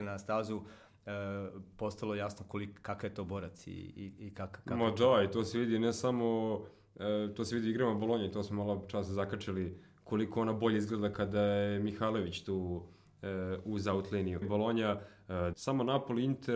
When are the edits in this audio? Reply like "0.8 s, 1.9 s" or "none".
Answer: 14.4 s, 15.5 s